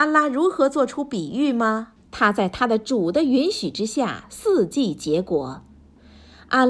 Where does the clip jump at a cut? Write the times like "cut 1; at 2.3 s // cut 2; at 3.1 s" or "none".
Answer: cut 1; at 2.0 s